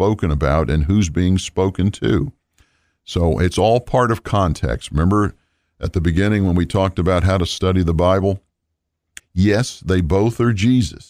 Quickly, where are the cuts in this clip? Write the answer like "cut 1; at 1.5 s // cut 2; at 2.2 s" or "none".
cut 1; at 9.2 s